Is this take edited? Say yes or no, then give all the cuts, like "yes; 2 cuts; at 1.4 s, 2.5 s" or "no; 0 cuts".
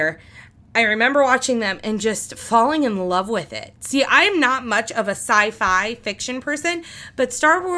no; 0 cuts